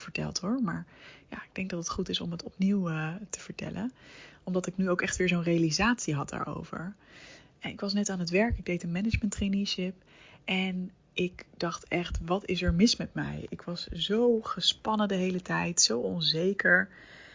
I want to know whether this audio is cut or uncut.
uncut